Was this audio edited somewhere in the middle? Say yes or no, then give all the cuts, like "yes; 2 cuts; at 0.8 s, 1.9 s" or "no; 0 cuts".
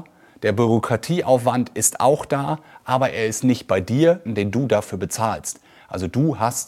yes; 1 cut; at 4.3 s